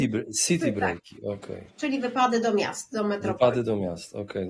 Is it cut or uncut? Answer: uncut